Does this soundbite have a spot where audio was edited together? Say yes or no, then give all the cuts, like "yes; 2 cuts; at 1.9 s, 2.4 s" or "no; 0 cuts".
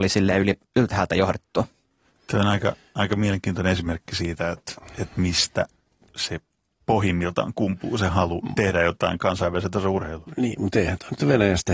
no; 0 cuts